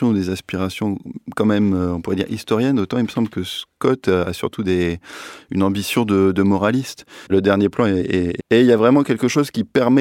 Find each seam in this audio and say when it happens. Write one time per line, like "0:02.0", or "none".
0:07.3
0:08.4

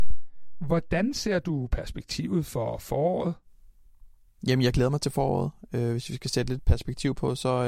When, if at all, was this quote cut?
none

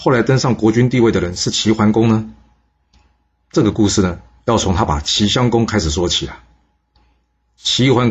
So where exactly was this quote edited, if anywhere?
0:04.9

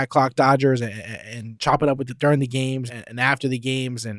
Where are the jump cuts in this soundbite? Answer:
0:02.9

